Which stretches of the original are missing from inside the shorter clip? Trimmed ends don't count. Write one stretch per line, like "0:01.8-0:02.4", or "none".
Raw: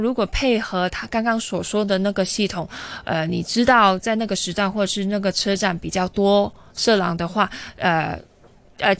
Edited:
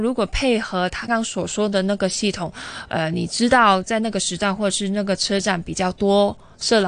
0:01.1-0:01.2